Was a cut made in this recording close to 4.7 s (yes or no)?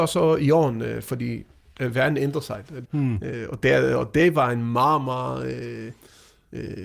no